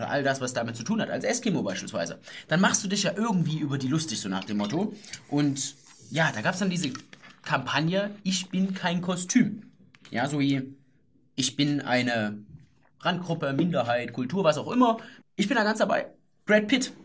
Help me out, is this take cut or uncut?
cut